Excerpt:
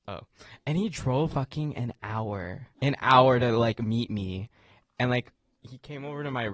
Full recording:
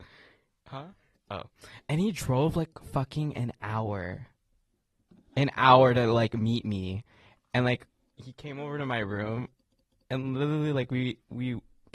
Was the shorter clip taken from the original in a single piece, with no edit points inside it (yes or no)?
no